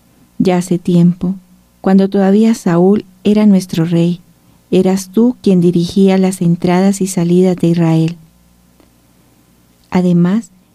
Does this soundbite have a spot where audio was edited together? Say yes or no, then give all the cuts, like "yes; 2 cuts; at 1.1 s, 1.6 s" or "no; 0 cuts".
no; 0 cuts